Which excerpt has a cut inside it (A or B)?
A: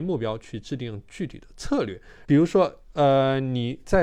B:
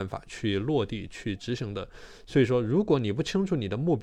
A